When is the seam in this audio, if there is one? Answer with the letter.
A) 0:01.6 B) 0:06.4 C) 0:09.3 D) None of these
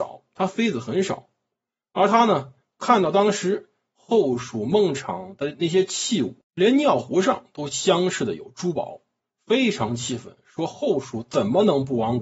B